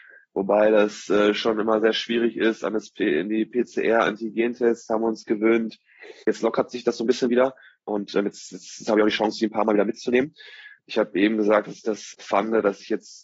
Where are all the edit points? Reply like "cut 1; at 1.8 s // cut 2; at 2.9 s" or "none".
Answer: cut 1; at 6.2 s // cut 2; at 10.8 s